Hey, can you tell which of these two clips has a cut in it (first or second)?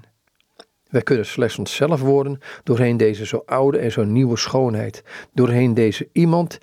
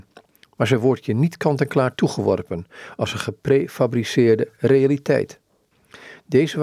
first